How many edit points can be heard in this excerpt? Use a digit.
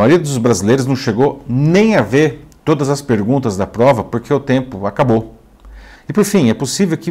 1